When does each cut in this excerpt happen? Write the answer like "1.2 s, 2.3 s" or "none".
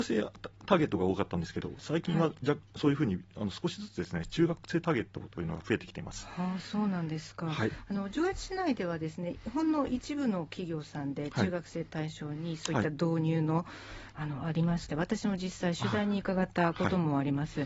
14.1 s